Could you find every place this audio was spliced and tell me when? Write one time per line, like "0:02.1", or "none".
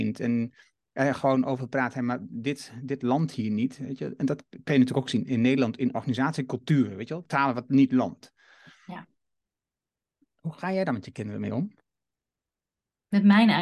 0:07.2